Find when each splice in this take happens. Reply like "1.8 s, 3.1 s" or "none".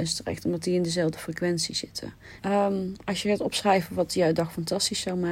2.4 s